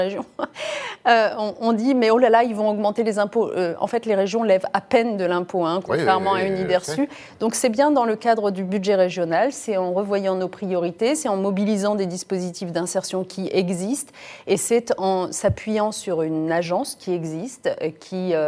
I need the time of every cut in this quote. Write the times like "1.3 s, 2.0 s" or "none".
none